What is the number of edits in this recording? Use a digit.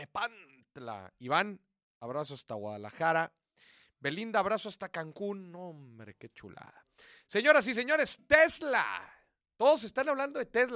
1